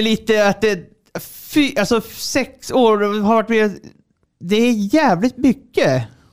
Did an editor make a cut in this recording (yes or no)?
no